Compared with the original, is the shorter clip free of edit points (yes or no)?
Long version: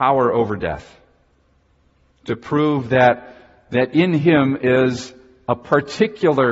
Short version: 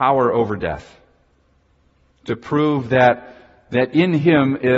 yes